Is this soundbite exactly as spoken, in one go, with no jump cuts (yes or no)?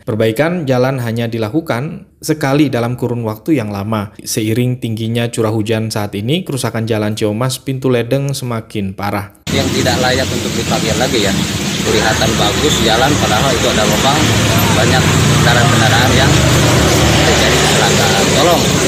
no